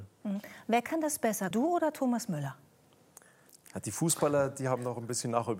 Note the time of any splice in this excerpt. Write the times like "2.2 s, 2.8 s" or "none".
1.5 s